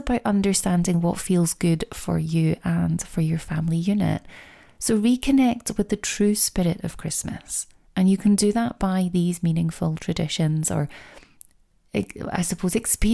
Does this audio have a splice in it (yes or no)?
no